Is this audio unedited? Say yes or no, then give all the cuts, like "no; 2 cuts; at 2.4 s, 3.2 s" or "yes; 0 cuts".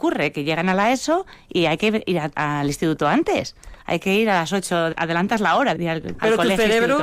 yes; 0 cuts